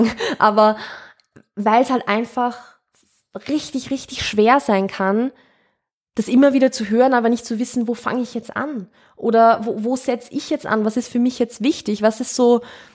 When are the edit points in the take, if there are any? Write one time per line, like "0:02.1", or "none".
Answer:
none